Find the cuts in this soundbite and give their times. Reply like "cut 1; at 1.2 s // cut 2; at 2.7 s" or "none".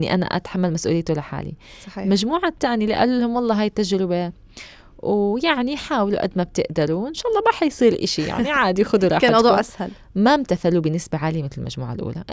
none

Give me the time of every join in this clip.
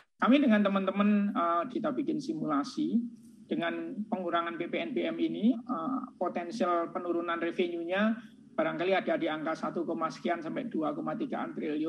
cut 1; at 1.7 s // cut 2; at 5.5 s

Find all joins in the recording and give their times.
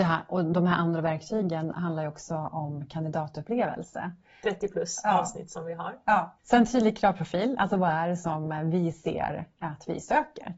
cut 1; at 4.4 s // cut 2; at 6.4 s

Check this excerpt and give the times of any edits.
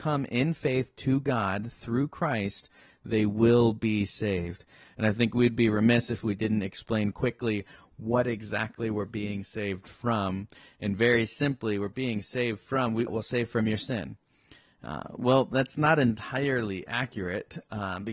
cut 1; at 13.1 s

